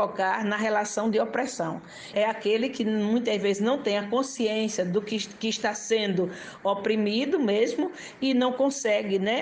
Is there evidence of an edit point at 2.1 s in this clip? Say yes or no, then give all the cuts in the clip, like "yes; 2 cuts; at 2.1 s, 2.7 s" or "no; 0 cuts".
yes; 1 cut; at 2.1 s